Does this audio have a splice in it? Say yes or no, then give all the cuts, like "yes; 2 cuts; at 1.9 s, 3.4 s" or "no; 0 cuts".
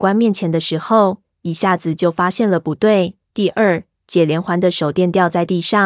yes; 1 cut; at 3.2 s